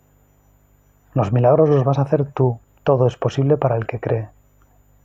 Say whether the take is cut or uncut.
cut